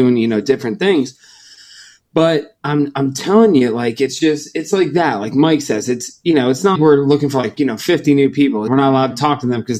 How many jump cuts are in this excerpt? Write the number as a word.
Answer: two